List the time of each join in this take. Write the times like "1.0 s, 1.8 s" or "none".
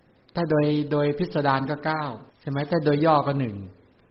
2.3 s